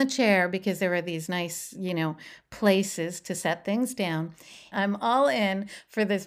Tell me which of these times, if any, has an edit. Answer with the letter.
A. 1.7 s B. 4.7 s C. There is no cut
B